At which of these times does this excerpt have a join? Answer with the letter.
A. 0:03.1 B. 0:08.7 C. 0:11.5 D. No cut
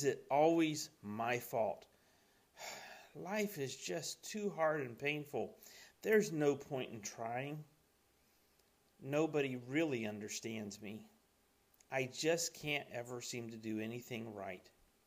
D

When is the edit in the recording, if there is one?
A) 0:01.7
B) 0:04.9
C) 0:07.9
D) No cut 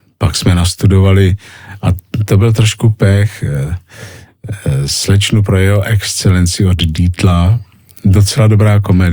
D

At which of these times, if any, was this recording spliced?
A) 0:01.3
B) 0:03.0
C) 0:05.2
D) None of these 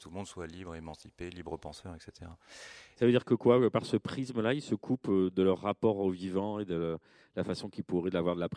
B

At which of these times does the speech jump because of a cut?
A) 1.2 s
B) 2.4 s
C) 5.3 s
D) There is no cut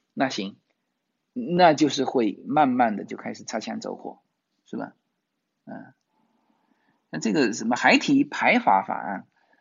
D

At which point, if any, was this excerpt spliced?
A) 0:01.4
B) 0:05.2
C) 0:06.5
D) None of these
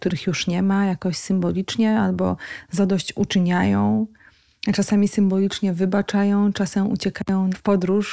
D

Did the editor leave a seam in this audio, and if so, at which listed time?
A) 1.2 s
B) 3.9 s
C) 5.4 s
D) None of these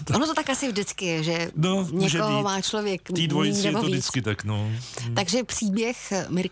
D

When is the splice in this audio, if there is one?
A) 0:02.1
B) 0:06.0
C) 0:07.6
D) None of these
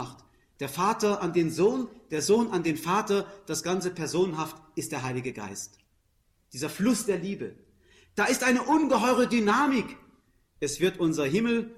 D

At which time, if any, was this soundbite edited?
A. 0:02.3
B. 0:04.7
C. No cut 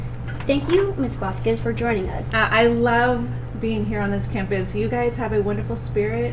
A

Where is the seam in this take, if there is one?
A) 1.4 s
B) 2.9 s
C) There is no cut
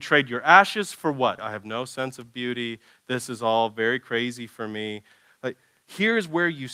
A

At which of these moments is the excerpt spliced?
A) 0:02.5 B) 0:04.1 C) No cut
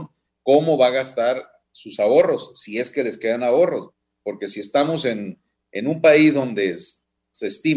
C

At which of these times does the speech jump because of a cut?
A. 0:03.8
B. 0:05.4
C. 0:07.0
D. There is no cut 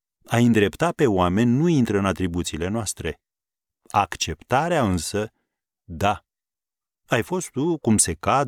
C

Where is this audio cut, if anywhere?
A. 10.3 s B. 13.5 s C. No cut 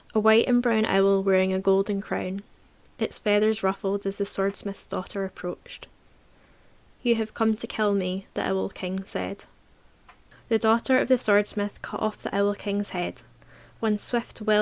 A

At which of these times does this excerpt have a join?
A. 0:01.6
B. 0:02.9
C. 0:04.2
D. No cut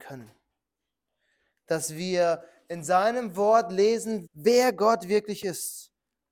C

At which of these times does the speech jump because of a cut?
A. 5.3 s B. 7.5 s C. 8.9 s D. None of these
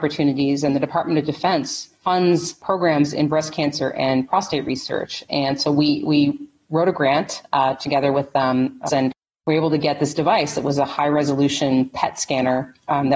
C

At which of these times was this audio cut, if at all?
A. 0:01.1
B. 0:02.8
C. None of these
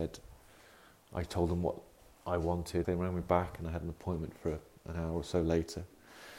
B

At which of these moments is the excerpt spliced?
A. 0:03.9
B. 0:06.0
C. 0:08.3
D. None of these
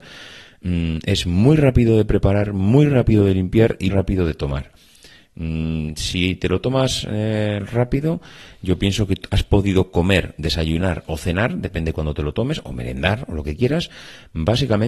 A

